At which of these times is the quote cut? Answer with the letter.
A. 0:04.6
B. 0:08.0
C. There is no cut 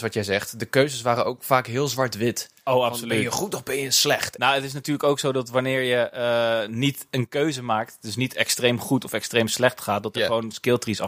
C